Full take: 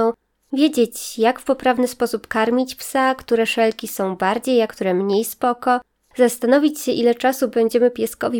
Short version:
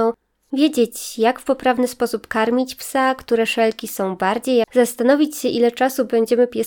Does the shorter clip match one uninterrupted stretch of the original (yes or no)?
no